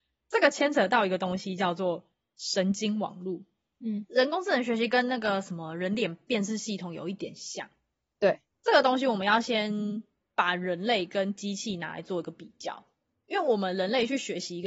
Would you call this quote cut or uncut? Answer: uncut